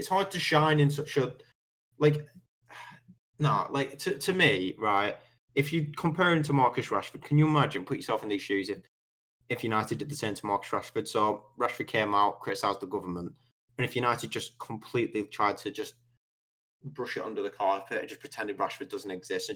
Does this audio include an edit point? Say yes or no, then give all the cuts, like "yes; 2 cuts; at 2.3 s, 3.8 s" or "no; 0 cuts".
no; 0 cuts